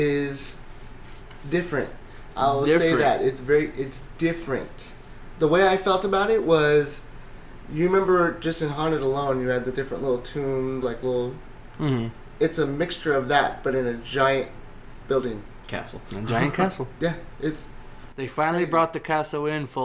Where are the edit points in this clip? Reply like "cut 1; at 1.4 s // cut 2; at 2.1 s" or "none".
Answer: cut 1; at 10.8 s